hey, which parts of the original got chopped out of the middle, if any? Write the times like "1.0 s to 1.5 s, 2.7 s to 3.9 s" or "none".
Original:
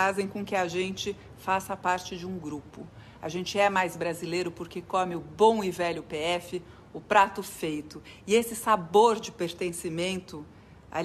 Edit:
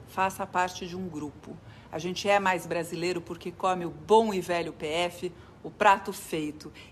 none